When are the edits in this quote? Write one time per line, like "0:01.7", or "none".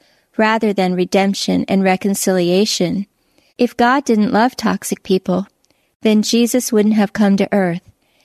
0:03.5